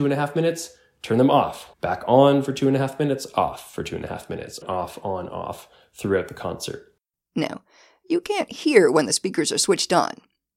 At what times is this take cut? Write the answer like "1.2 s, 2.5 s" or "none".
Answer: 1.7 s, 4.6 s